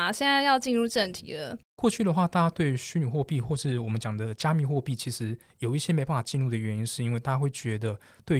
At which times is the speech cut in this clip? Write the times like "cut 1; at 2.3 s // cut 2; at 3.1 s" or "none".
cut 1; at 1.6 s